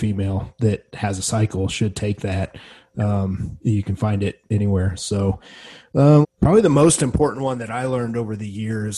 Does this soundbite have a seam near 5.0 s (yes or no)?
yes